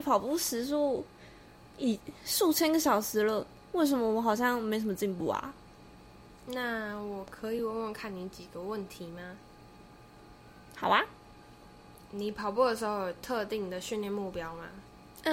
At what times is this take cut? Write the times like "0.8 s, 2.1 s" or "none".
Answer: none